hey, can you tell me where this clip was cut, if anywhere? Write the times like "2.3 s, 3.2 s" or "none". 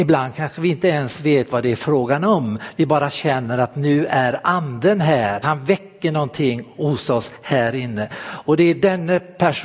5.4 s